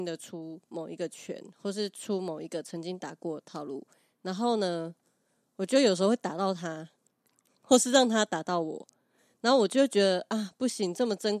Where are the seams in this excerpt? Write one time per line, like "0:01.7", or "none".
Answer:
none